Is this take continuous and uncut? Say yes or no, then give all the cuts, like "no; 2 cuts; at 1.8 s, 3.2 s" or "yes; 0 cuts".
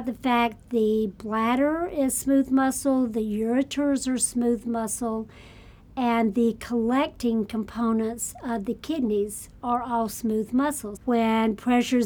no; 1 cut; at 11.0 s